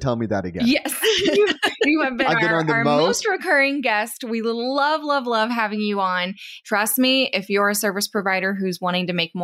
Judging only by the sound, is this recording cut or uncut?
cut